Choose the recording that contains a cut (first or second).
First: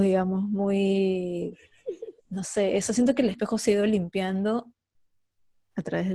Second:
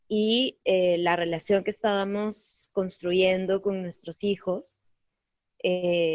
first